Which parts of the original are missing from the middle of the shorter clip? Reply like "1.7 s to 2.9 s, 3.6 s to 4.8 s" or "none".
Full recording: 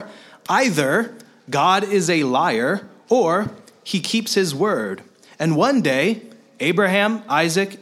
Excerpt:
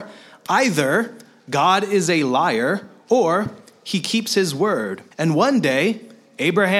5.1 s to 5.3 s